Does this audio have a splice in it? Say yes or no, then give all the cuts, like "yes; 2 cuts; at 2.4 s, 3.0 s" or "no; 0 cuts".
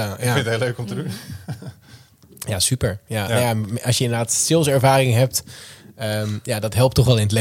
no; 0 cuts